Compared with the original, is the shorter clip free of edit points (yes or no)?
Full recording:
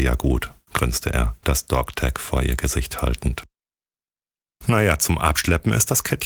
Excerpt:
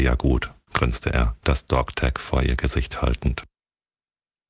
yes